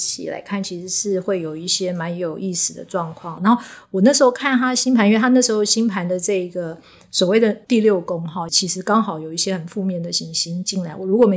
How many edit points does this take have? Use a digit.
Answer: 2